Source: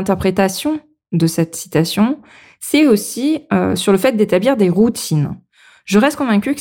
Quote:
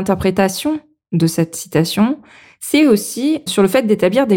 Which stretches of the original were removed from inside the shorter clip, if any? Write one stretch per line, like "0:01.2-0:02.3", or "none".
0:03.5-0:03.8